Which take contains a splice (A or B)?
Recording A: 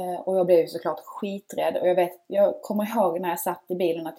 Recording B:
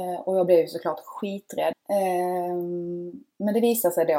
B